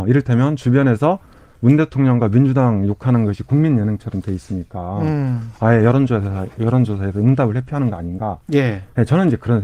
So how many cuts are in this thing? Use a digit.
0